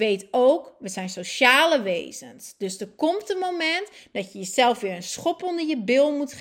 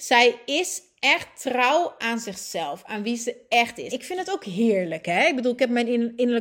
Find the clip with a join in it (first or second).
second